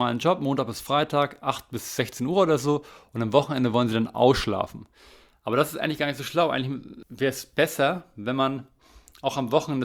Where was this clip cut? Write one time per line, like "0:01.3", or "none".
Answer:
none